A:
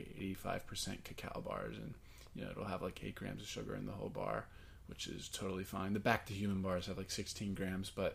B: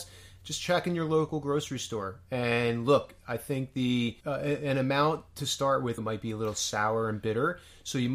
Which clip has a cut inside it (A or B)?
B